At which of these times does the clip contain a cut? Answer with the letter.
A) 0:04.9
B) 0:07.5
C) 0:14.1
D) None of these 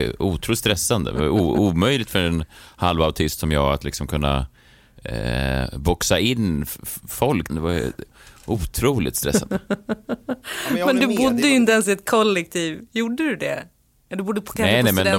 B